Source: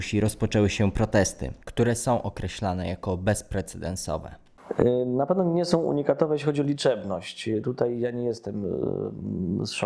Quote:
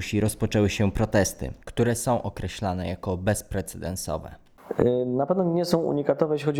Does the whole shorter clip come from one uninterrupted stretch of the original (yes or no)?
yes